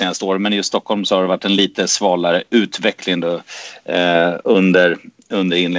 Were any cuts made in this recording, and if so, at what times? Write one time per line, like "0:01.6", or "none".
none